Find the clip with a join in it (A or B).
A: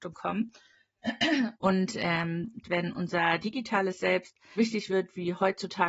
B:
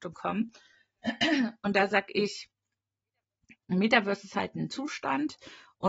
A